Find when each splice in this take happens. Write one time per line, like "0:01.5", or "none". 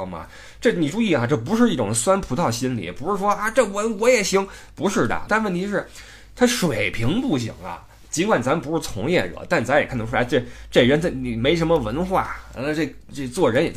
0:05.3